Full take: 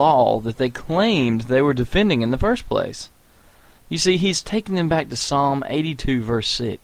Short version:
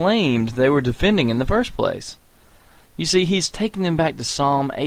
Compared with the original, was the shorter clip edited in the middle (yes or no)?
no